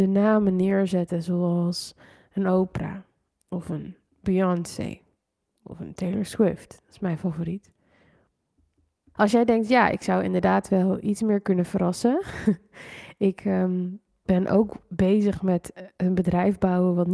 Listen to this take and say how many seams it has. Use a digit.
1